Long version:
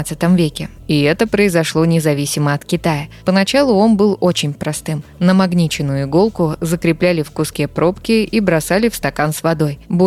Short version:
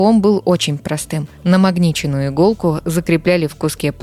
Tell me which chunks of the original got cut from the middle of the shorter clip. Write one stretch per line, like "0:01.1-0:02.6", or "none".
none

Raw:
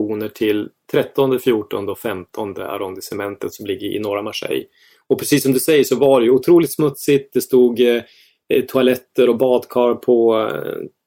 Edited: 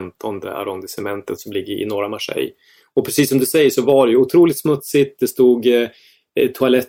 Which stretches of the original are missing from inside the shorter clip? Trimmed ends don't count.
none

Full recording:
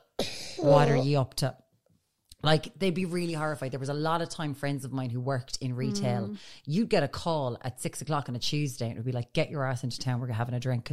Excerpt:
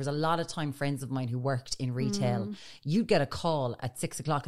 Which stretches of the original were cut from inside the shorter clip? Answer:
none

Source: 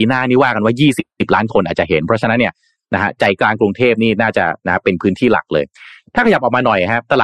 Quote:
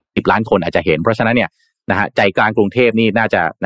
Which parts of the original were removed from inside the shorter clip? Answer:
none

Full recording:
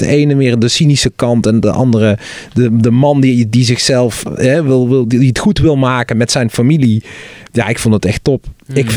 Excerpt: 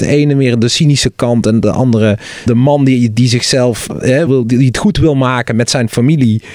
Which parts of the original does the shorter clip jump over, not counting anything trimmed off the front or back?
0:02.5-0:02.8
0:04.6-0:04.9

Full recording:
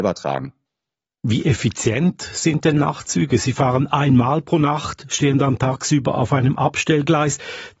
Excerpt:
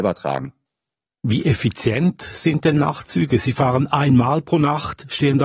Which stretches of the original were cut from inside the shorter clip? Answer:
none

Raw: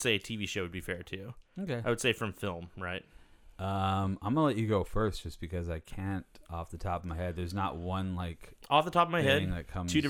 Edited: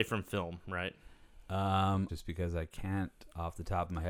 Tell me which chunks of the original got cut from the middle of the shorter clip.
0:04.2-0:05.2

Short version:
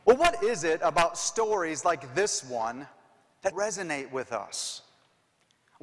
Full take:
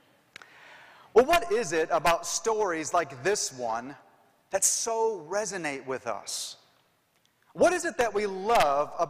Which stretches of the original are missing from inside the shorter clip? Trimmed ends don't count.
0:04.6-0:05.3

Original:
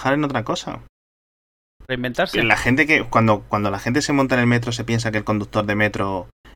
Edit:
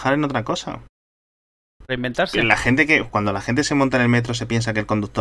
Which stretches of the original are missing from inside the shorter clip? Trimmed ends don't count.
0:03.1-0:03.4

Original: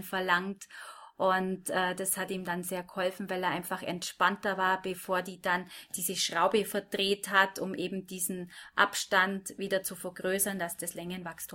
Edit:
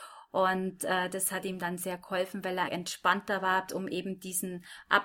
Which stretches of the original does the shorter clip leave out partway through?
0:03.5-0:03.8
0:04.8-0:07.5

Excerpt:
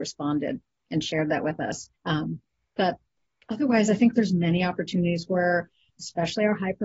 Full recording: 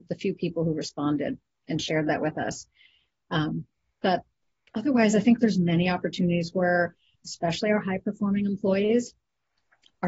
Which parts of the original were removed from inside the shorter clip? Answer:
0:02.7-0:03.2

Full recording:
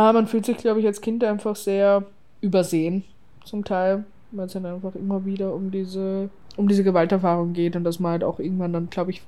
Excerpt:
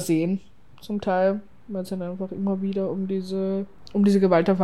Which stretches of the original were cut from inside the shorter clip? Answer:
none

